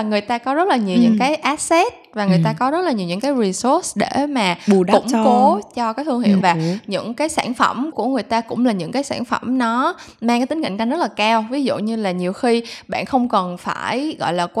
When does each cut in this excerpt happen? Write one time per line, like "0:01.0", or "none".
0:06.4
0:07.9